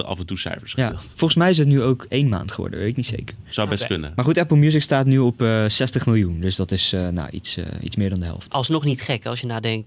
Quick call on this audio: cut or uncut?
uncut